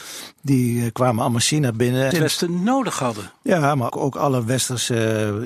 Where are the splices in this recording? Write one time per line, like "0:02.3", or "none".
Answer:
0:02.1
0:03.9